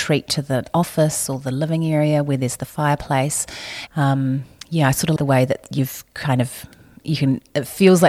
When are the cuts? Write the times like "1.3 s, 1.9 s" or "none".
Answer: 3.9 s, 5.2 s